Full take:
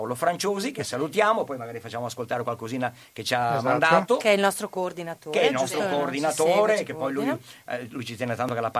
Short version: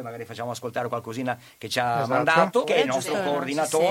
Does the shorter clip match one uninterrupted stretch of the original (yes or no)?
no